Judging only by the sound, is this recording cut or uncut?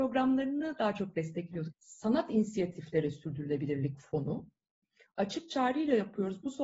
cut